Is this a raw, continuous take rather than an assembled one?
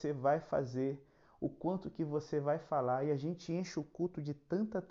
yes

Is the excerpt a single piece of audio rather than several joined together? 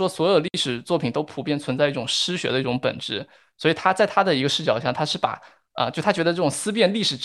yes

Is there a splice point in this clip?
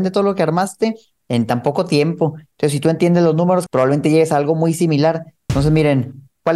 yes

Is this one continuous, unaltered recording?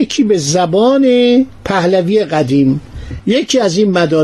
no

